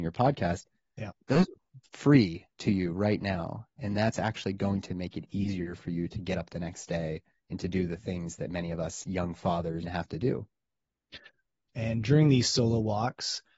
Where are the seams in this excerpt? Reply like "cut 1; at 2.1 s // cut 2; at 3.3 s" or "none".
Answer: cut 1; at 9.8 s // cut 2; at 11.7 s